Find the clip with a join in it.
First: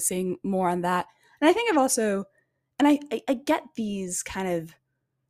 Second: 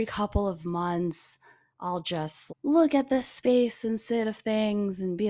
second; 1 cut; at 2.5 s

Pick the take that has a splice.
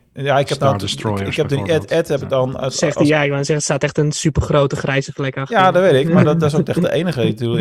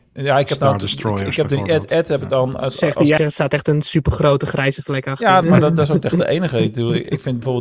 second; 2 cuts; at 3.2 s, 5.4 s

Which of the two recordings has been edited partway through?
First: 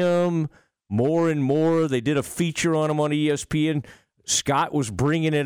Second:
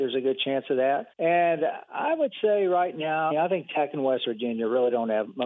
second; 2 cuts; at 1.1 s, 3.3 s

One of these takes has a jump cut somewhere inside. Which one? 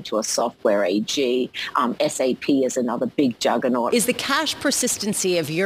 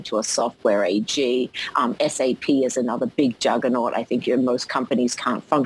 first; 1 cut; at 3.9 s

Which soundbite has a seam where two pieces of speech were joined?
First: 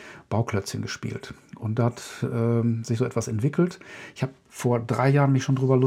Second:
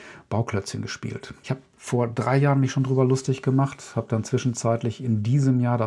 second; 1 cut; at 1.4 s

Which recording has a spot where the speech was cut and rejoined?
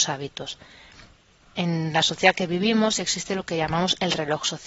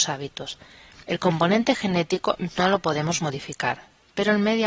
second; 1 cut; at 1.0 s

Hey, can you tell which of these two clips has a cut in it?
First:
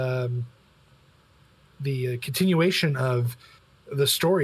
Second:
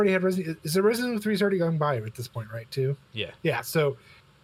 second; 1 cut; at 3.4 s

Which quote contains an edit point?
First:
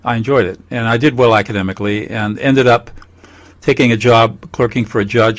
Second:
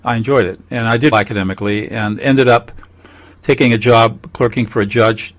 second; 1 cut; at 1.1 s

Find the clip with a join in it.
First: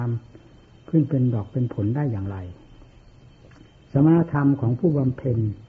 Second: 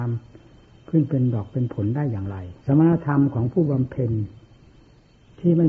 second; 1 cut; at 2.6 s

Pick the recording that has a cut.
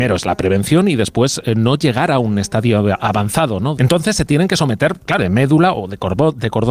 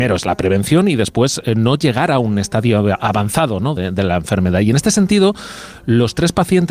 first; 2 cuts; at 3.8 s, 5.2 s

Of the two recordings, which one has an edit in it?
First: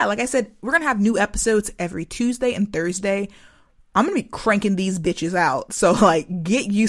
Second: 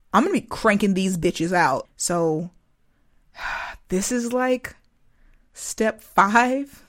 second; 1 cut; at 1.8 s

